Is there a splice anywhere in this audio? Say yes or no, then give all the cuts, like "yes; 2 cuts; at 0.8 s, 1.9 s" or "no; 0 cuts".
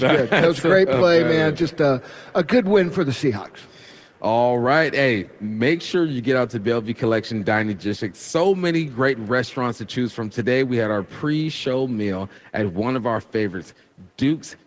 no; 0 cuts